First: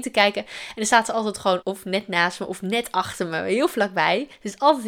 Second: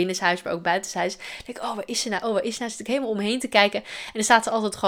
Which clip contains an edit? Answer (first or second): first